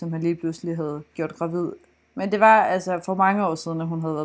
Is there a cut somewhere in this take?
no; 0 cuts

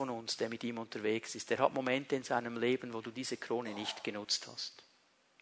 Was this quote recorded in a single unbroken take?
yes; 0 cuts

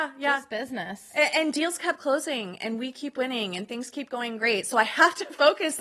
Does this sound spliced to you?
no; 0 cuts

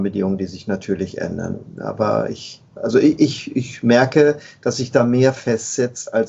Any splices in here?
no; 0 cuts

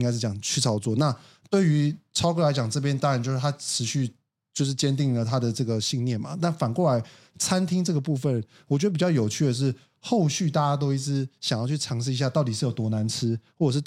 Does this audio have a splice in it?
no; 0 cuts

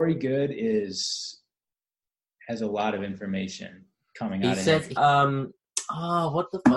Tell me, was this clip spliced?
yes; 1 cut; at 5.0 s

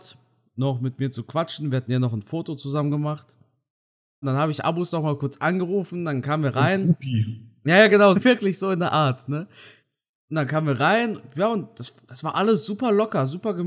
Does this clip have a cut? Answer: yes; 2 cuts; at 4.2 s, 8.1 s

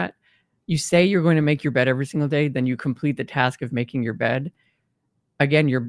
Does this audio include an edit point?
no; 0 cuts

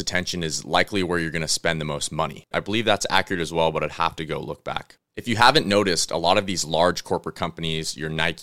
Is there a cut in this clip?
yes; 1 cut; at 2.5 s

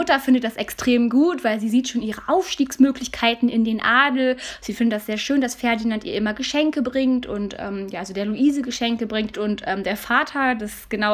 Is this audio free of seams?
no; 1 cut; at 9.3 s

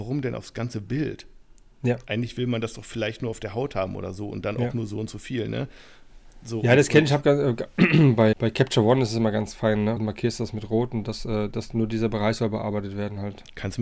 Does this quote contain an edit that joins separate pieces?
yes; 2 cuts; at 8.3 s, 10.0 s

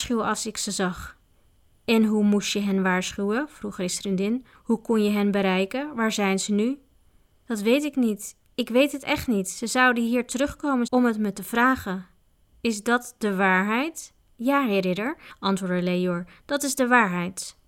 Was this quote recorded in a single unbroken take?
no; 1 cut; at 10.9 s

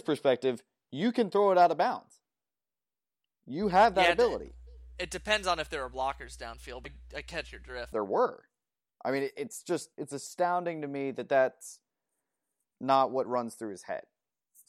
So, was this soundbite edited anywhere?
yes; 3 cuts; at 6.8 s, 7.9 s, 9.9 s

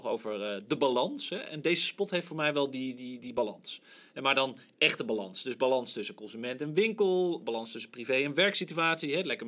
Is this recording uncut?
yes; 0 cuts

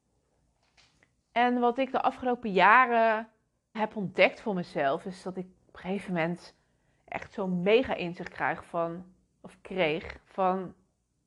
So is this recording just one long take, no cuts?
no; 2 cuts; at 3.7 s, 5.6 s

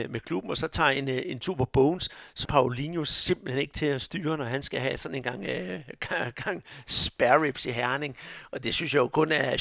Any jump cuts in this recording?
yes; 1 cut; at 2.4 s

